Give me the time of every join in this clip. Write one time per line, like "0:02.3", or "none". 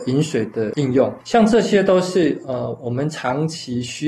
0:01.2